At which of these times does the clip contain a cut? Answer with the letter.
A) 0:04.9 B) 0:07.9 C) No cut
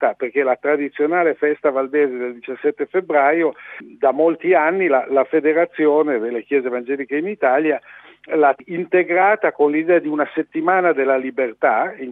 C